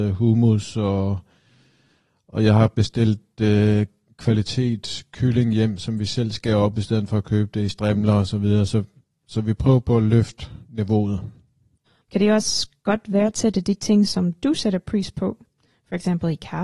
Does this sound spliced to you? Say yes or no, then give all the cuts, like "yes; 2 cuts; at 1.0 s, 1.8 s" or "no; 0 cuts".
yes; 1 cut; at 12.0 s